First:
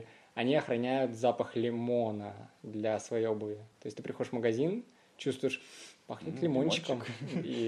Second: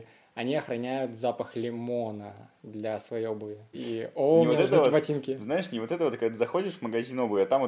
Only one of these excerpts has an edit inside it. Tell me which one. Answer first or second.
second